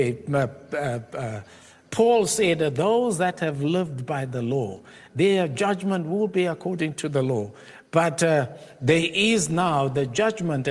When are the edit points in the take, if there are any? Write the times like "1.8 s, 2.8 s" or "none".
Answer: 5.1 s